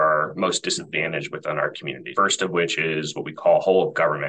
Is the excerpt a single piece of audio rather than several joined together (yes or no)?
no